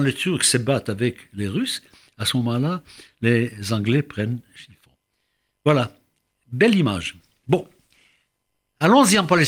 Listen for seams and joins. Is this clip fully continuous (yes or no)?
yes